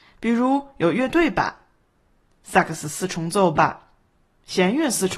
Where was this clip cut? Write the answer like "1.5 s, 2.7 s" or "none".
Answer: none